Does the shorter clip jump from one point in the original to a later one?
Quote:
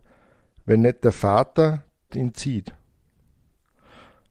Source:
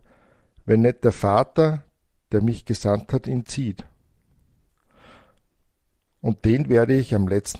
yes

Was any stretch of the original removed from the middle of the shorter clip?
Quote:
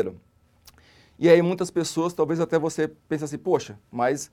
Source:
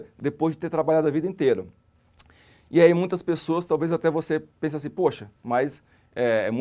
no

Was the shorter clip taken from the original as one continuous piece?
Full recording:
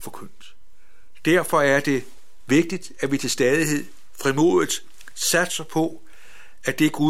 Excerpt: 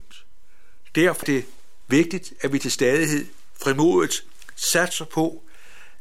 no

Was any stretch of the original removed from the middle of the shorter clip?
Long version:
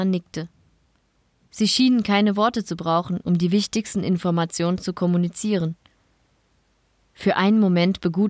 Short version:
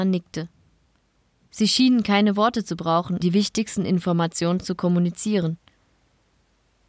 yes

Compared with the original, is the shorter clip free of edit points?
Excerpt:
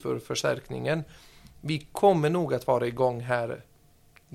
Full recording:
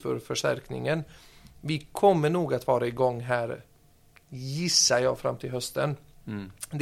yes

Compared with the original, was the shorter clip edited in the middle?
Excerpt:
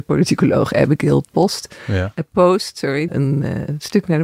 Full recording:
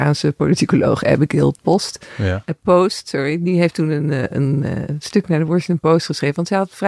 yes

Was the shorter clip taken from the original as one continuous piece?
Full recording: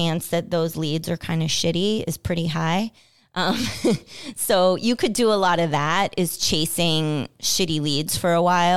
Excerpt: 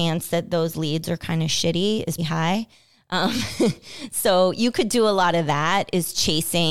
no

